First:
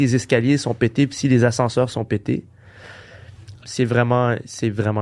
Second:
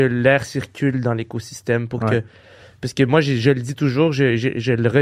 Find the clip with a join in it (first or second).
first